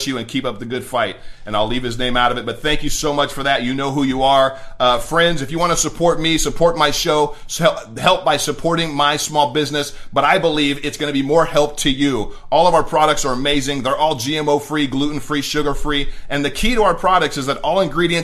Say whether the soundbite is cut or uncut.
uncut